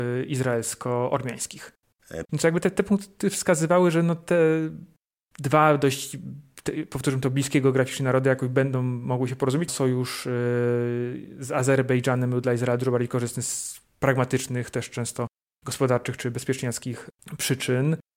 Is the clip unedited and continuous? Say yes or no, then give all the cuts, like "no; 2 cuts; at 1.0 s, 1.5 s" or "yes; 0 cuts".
no; 2 cuts; at 2.2 s, 9.7 s